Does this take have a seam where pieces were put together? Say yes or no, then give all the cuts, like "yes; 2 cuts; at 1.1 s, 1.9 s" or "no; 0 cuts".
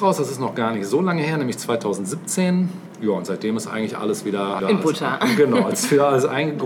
yes; 1 cut; at 4.6 s